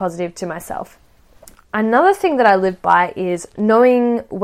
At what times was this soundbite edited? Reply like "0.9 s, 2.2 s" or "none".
1.5 s